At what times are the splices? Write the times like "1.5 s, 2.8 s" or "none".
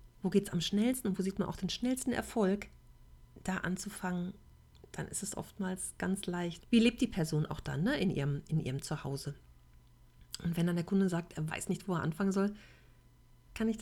6.6 s